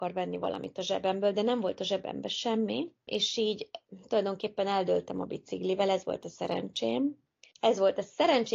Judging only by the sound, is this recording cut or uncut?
cut